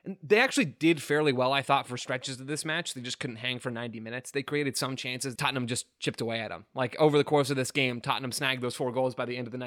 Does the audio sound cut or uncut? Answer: cut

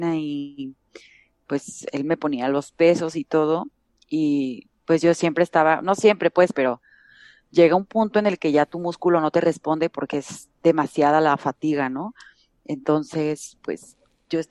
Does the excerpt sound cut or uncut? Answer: uncut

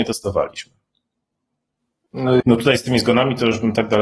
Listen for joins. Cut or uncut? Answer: cut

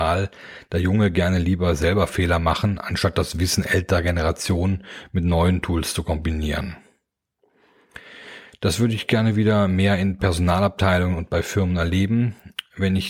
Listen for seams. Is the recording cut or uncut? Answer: uncut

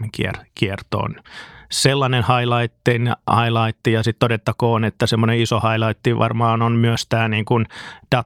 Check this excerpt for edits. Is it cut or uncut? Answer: uncut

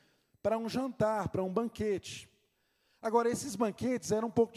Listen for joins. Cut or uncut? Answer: uncut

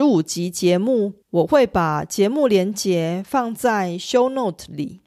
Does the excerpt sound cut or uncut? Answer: cut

